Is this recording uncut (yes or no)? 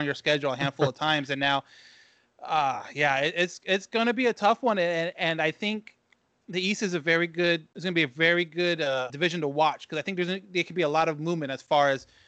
no